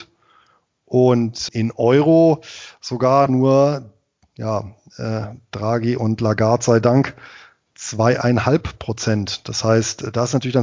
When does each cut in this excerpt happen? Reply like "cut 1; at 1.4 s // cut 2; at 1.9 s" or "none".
cut 1; at 1.5 s